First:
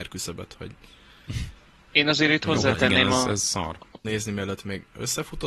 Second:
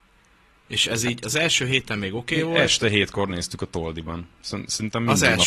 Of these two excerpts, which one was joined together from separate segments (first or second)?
first